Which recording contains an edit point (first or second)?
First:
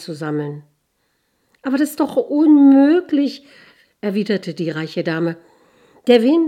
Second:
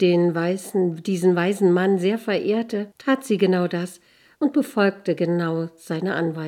second